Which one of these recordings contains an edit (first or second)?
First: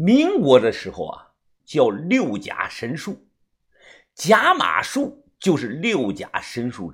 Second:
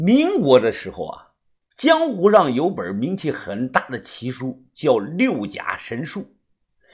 first